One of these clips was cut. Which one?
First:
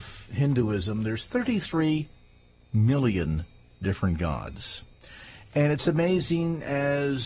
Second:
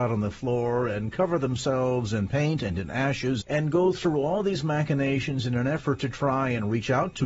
second; 1 cut; at 3.4 s

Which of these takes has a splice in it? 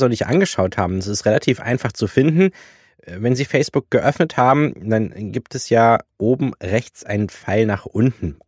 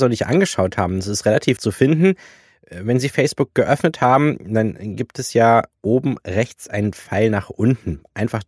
second; 1 cut; at 1.6 s

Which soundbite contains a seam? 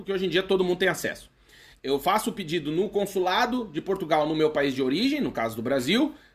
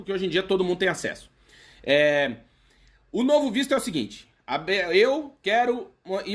first; 1 cut; at 1.7 s

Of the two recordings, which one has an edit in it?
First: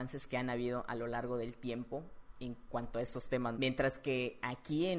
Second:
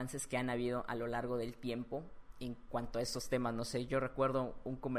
first; 1 cut; at 3.5 s

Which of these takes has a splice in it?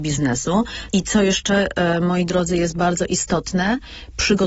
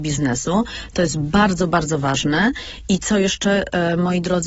first; 1 cut; at 0.9 s

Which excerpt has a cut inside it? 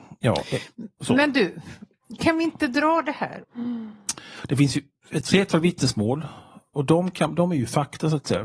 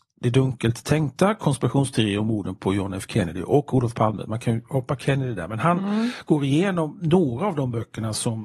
first; 1 cut; at 3.4 s

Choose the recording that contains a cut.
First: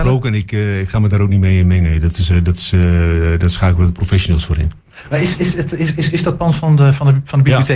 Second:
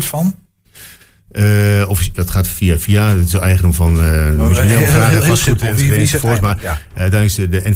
second; 1 cut; at 2.1 s

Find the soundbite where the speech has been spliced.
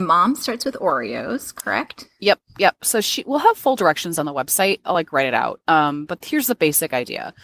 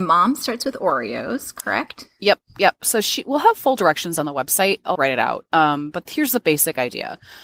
second; 1 cut; at 4.9 s

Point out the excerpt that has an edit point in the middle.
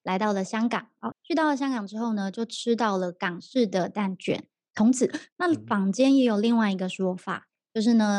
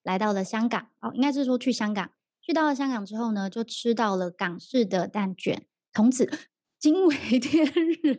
first; 2 cuts; at 1.1 s, 5.3 s

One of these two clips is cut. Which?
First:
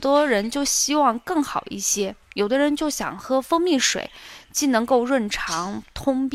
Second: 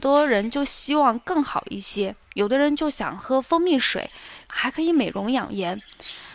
second; 1 cut; at 4.4 s

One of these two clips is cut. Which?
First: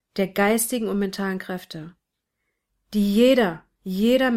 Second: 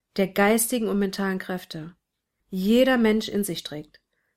second; 1 cut; at 2.4 s

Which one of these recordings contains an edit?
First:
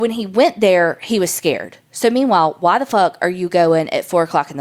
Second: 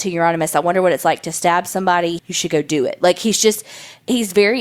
second; 1 cut; at 2.2 s

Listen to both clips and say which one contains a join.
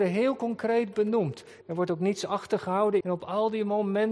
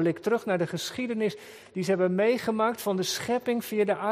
first; 2 cuts; at 1.6 s, 3.0 s

